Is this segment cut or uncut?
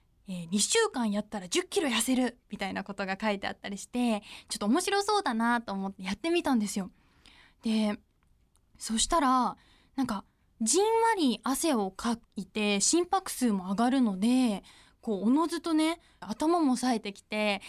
cut